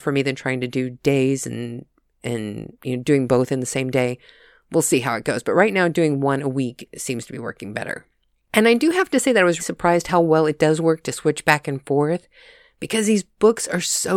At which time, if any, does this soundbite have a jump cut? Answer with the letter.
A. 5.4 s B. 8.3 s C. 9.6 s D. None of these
C